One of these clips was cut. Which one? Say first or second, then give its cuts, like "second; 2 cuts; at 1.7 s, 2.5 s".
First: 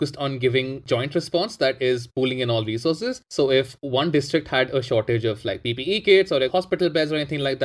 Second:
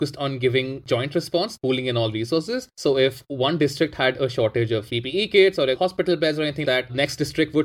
second; 3 cuts; at 1.6 s, 4.9 s, 6.6 s